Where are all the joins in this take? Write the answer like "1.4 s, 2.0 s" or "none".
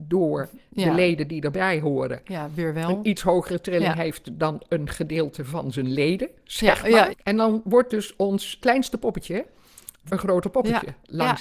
7.1 s, 8.6 s, 10.1 s